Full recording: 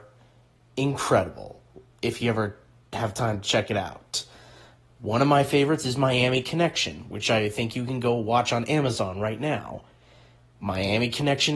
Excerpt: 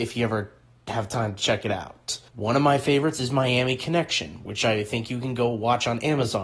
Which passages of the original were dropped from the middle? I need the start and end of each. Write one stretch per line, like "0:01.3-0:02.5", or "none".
0:04.3-0:04.9